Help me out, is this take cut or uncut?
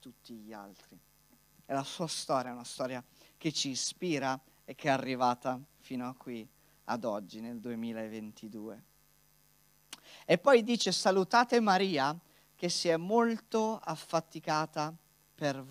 uncut